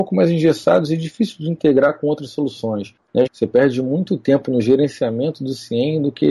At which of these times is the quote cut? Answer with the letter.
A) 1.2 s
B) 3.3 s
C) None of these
B